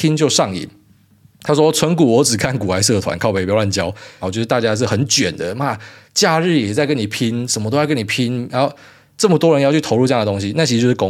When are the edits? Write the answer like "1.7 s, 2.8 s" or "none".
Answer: 4.2 s, 8.5 s

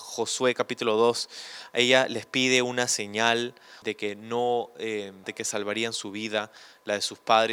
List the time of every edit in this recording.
3.8 s, 5.2 s

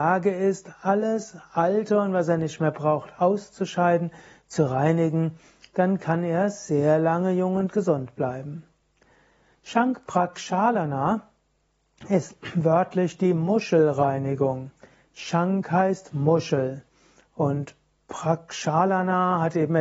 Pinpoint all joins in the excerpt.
none

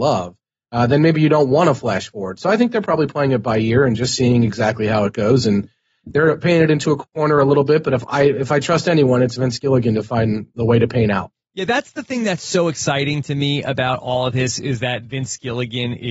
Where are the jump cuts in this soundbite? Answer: none

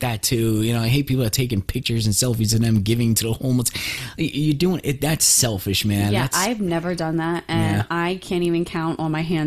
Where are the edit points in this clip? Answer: none

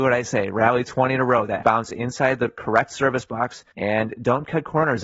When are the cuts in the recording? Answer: 1.6 s, 3.7 s

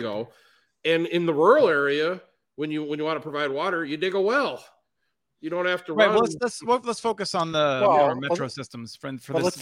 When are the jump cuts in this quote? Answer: none

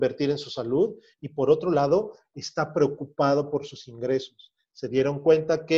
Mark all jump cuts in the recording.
none

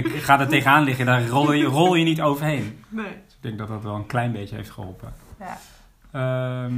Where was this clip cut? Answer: none

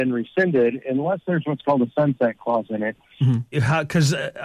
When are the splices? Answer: 3.5 s

